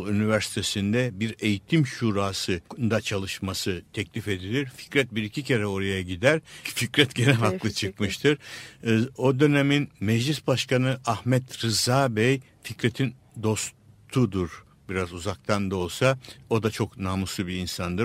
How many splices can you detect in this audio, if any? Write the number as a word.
three